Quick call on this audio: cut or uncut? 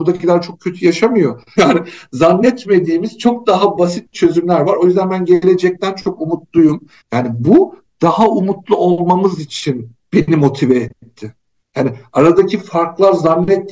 cut